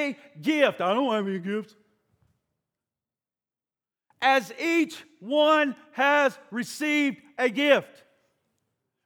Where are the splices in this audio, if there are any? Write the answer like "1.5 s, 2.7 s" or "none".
none